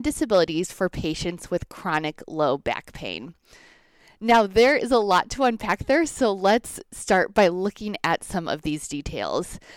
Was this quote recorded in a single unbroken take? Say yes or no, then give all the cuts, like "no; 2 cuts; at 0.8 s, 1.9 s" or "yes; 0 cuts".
yes; 0 cuts